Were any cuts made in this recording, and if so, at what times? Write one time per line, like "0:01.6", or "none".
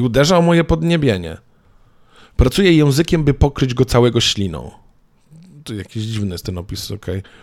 none